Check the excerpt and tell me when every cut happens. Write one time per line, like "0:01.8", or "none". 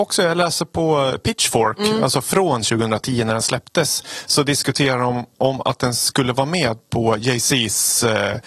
none